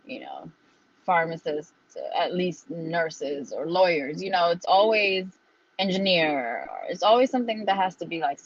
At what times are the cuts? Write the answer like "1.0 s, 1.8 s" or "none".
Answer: none